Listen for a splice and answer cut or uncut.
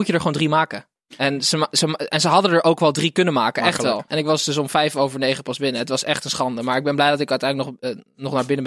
cut